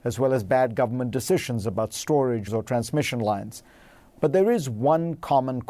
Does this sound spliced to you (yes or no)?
yes